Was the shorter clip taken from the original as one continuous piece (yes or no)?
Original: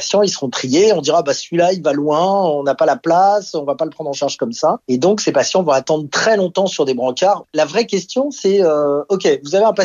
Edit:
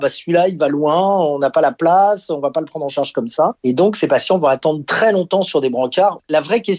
yes